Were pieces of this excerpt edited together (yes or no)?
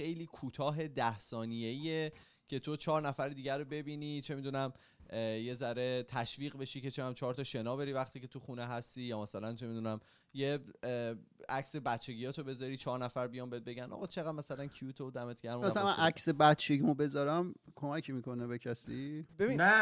yes